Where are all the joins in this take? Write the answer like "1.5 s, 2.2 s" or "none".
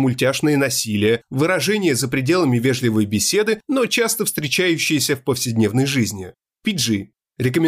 6.4 s